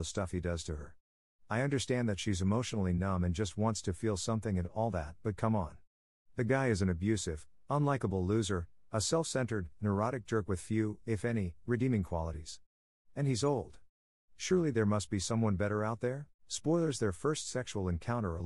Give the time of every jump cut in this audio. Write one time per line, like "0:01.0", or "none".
0:16.4